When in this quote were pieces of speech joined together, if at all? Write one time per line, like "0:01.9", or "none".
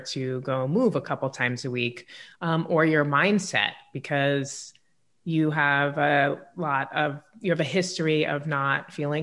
none